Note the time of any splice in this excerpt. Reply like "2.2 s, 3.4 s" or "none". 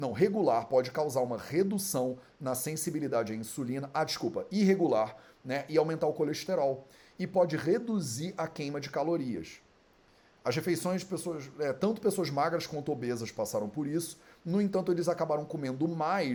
none